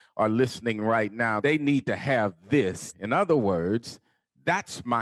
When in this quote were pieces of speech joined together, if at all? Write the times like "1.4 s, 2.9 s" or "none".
1.4 s, 2.9 s